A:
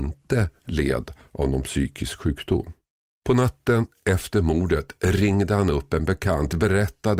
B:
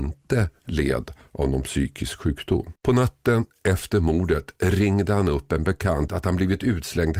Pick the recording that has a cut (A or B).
B